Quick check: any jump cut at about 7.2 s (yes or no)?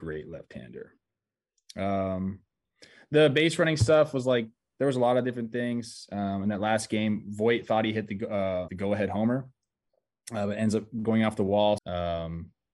no